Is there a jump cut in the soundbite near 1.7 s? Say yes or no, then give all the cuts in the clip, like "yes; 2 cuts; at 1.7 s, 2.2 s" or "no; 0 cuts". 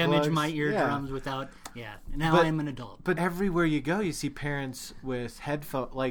no; 1 cut; at 3.1 s